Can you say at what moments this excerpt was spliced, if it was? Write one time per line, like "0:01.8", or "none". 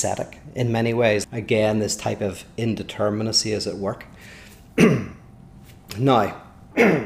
0:01.2